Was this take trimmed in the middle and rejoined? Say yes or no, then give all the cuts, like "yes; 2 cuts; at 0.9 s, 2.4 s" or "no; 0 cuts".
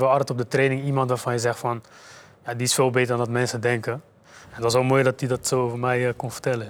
no; 0 cuts